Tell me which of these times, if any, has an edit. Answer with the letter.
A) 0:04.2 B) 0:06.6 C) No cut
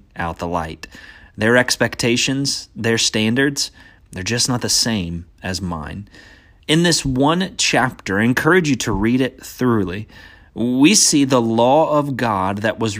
B